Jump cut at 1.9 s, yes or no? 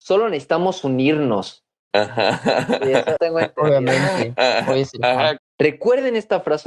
yes